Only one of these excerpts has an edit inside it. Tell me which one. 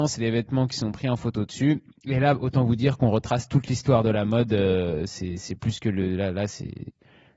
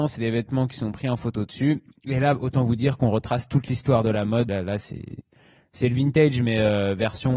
second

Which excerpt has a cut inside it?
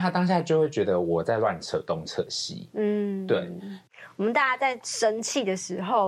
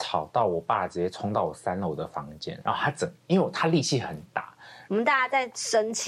second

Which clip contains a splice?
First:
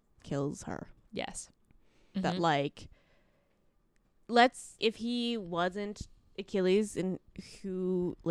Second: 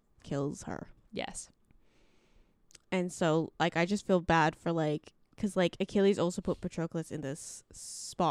first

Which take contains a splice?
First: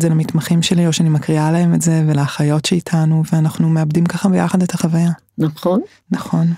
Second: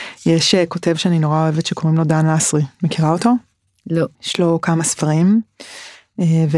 second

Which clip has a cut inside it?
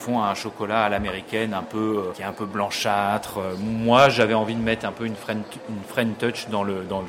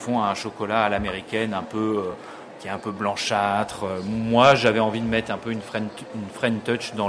first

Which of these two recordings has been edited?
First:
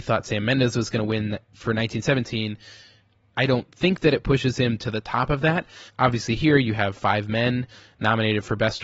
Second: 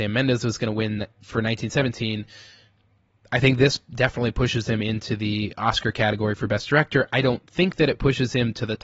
first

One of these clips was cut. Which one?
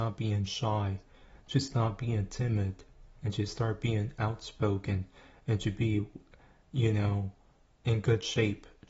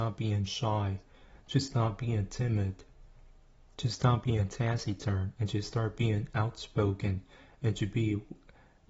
first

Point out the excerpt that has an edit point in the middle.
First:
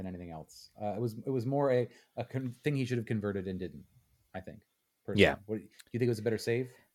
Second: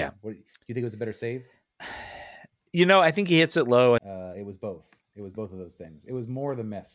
second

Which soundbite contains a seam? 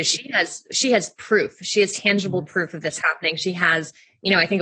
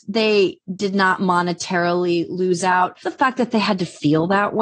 second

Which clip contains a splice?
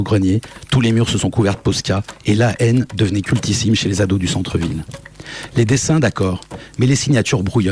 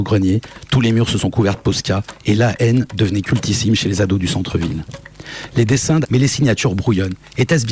second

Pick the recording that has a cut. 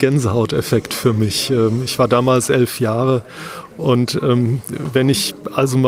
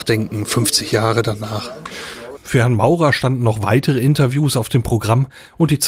second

